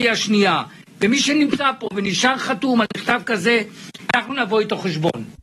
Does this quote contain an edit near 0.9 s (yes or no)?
no